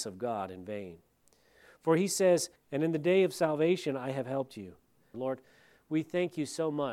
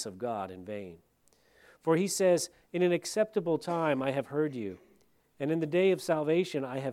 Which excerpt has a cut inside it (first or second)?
first